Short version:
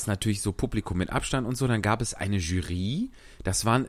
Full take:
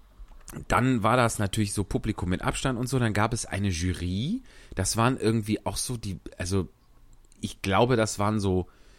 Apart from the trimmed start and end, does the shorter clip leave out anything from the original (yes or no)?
no